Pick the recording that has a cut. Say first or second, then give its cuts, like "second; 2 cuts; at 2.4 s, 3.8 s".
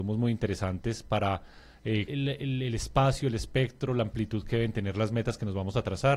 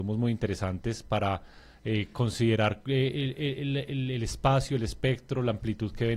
first; 1 cut; at 2.1 s